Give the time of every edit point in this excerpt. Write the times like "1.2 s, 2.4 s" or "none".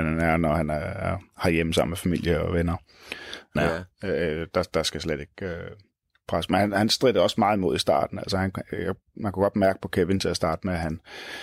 3.6 s

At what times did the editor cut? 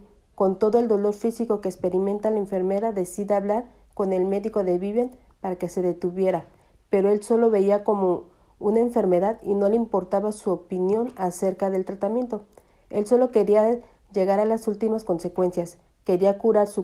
none

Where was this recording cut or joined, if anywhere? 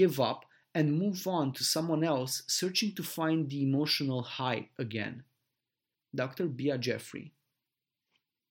5.9 s

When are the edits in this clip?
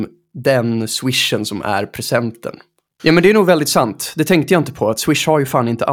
3.0 s

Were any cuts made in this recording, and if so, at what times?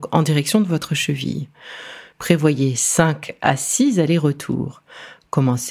2.1 s

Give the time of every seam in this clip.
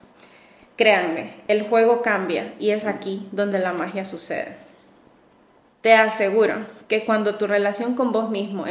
5.7 s

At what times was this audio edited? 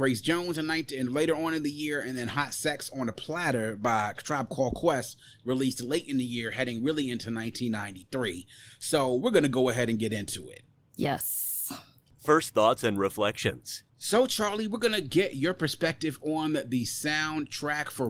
13.9 s

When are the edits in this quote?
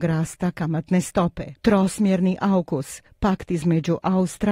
1.6 s

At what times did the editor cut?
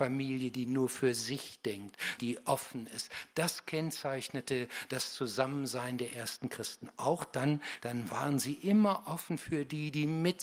2.2 s, 7.8 s

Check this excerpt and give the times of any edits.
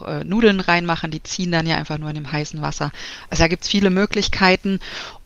none

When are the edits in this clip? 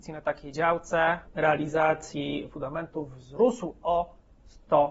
1.3 s

